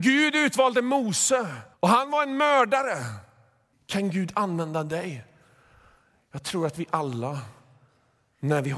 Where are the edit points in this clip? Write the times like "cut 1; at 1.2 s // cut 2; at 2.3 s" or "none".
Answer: cut 1; at 1.7 s // cut 2; at 3.7 s